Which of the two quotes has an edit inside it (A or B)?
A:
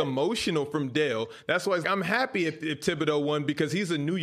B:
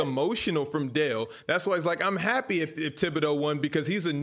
A